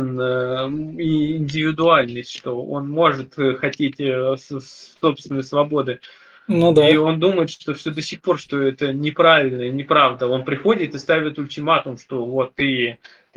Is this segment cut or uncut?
uncut